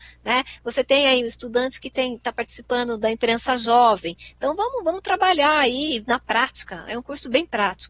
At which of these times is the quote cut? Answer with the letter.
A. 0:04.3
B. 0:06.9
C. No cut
A